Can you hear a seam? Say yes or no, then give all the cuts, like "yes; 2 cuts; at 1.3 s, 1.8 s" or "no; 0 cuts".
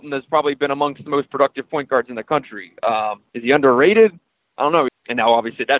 yes; 2 cuts; at 3.3 s, 4.9 s